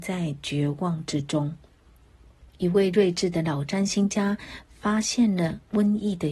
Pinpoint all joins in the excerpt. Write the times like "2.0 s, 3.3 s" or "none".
2.5 s